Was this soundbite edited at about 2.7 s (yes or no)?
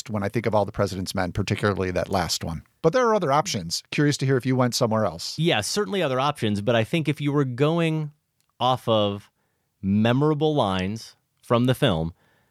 no